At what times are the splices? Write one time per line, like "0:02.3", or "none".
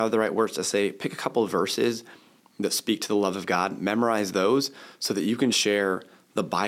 0:05.5